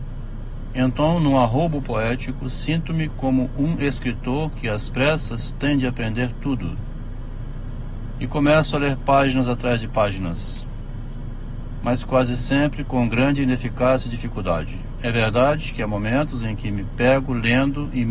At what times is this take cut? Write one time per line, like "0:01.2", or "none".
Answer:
none